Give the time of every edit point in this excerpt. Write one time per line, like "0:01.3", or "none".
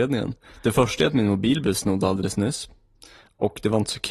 none